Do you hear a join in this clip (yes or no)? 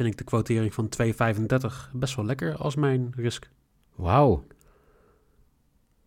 no